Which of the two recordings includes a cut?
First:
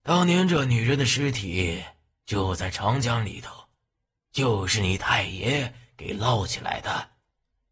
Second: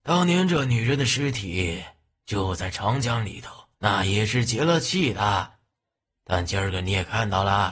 second; 1 cut; at 3.8 s

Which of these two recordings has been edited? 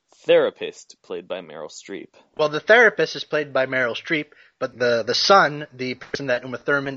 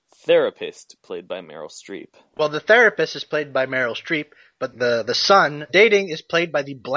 second; 1 cut; at 5.7 s

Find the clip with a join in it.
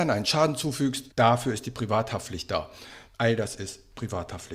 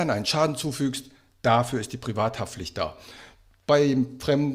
first; 2 cuts; at 1.1 s, 3.1 s

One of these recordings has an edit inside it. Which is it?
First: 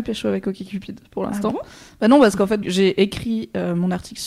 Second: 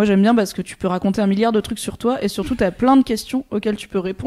first; 1 cut; at 2.6 s

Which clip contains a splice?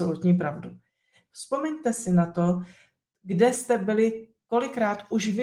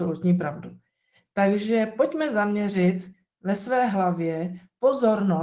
first; 1 cut; at 1.3 s

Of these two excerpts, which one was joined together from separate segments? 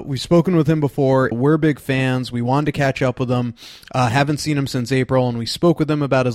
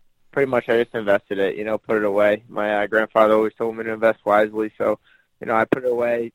first; 1 cut; at 1.3 s

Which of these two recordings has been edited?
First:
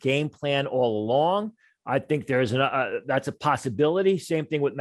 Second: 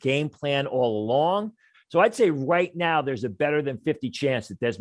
second; 2 cuts; at 1.7 s, 3.8 s

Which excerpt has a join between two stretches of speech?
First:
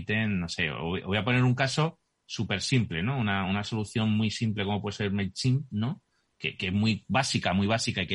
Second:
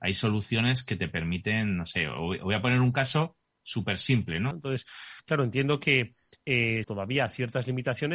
second; 2 cuts; at 4.5 s, 6.8 s

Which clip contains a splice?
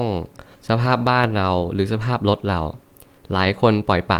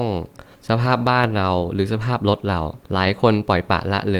second; 1 cut; at 2.8 s

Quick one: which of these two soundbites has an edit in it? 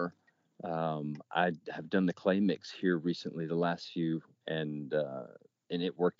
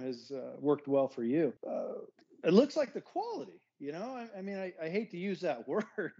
second; 1 cut; at 1.6 s

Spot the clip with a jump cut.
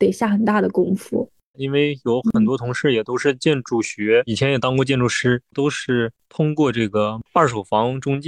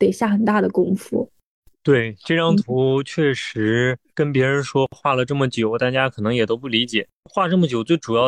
first; 2 cuts; at 1.5 s, 5.5 s

